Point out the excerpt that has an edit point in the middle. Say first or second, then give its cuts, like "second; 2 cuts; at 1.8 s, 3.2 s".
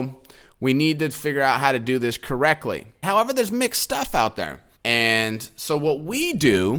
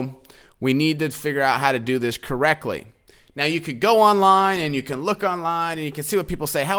first; 2 cuts; at 3.0 s, 4.7 s